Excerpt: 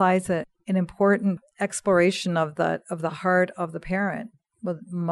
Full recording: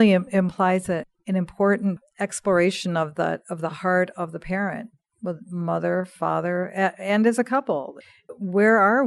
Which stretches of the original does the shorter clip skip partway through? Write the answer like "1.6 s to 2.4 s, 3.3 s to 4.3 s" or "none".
none